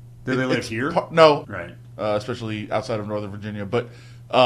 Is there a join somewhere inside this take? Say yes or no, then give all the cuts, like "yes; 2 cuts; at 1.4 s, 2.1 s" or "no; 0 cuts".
yes; 1 cut; at 1.4 s